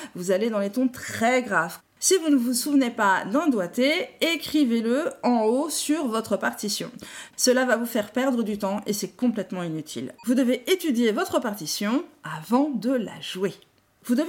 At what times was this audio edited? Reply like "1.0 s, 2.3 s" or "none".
1.8 s, 7.3 s, 10.2 s